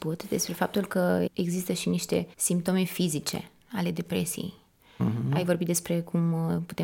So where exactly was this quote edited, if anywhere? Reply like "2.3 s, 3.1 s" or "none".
1.3 s, 2.3 s